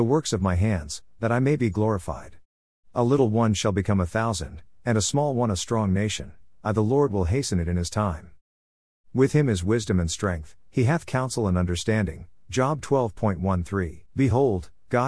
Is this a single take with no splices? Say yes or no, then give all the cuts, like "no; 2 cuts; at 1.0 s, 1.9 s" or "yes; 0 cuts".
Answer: no; 1 cut; at 14.1 s